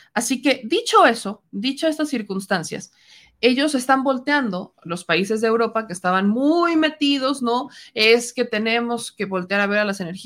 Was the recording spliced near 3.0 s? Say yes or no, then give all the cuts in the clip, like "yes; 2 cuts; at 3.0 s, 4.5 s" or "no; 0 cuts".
no; 0 cuts